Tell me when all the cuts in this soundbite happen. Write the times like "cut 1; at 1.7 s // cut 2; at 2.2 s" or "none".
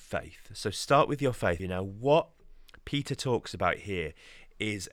cut 1; at 1.6 s

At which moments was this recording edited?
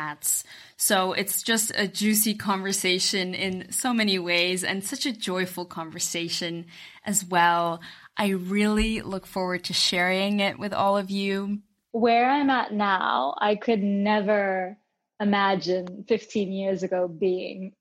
cut 1; at 11.9 s

